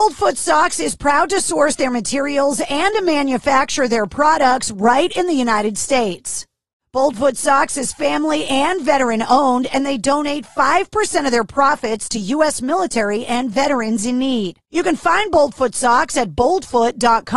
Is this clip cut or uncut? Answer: uncut